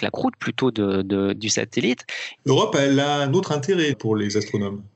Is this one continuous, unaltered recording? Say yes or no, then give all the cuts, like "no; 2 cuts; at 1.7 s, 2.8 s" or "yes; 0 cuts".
no; 2 cuts; at 2.4 s, 3.9 s